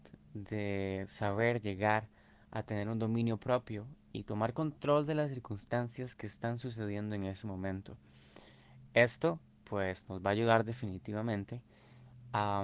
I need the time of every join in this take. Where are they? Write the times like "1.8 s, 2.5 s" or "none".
none